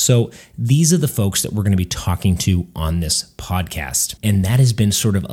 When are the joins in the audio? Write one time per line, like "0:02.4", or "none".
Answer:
0:04.2